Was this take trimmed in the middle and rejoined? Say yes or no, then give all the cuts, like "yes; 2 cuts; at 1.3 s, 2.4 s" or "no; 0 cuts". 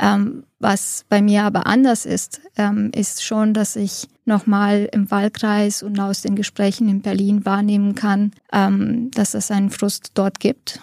yes; 2 cuts; at 4.2 s, 8.4 s